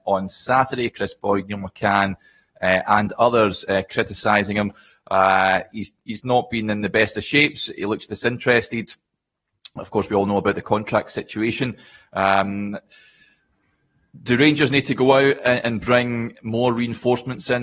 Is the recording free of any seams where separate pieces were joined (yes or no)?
yes